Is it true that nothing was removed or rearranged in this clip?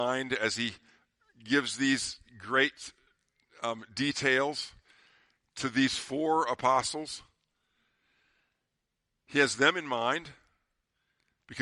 yes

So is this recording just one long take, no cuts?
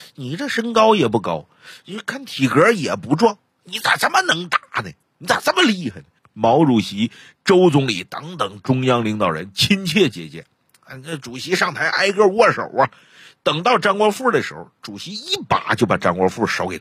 no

